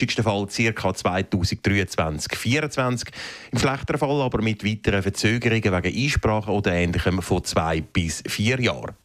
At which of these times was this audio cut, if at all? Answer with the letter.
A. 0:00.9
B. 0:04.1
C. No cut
C